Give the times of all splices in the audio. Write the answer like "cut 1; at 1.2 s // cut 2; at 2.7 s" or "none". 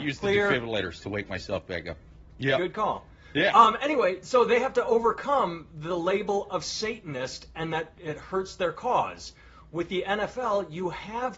none